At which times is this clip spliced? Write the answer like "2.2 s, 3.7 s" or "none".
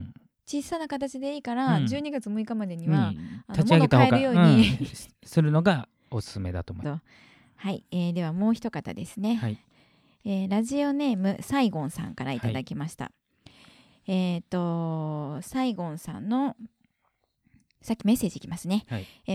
6.8 s